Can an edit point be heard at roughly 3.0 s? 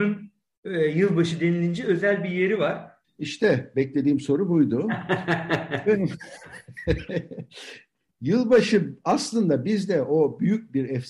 yes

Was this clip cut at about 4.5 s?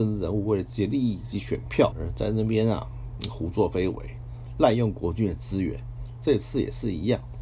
no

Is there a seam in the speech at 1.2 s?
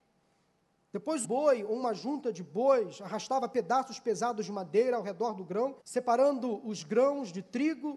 yes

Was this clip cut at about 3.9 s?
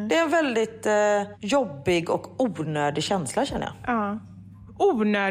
no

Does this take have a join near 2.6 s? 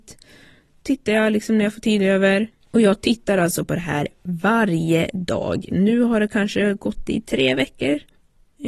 yes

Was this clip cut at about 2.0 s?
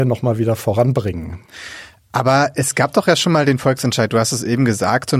no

